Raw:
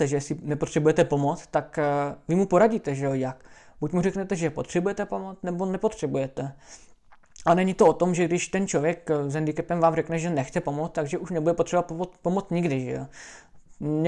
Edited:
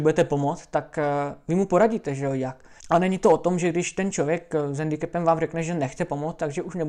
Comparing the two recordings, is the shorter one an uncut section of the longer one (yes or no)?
no